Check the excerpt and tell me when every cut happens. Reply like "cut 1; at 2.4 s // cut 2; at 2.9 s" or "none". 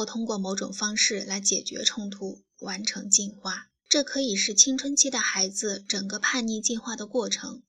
cut 1; at 3.8 s